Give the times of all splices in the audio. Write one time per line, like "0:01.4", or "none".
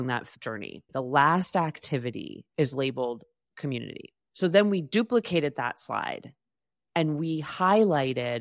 none